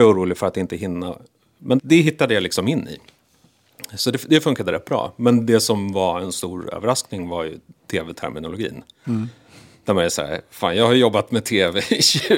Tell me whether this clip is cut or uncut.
cut